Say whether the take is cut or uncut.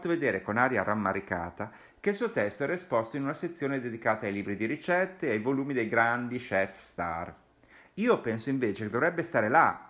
uncut